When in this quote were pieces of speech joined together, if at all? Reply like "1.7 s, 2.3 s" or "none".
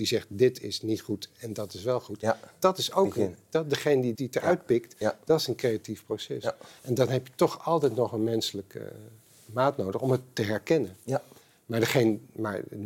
4.1 s